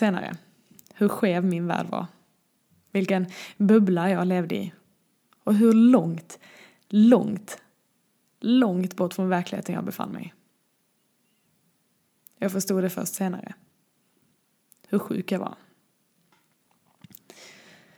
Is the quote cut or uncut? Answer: uncut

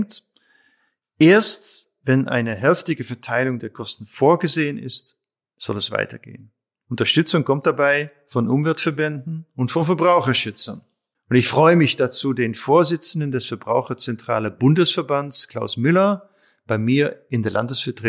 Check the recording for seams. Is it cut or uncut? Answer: uncut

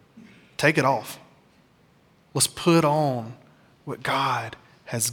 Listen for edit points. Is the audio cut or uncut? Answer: uncut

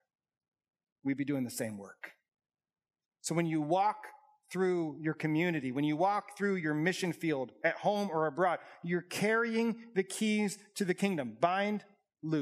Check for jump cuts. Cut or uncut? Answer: uncut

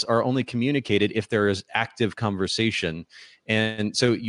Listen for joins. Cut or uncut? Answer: uncut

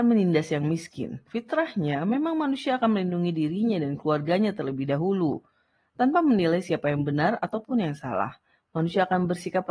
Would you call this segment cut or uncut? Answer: cut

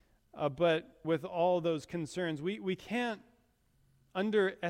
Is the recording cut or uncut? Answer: cut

